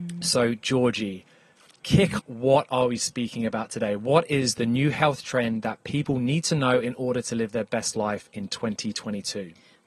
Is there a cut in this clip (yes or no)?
yes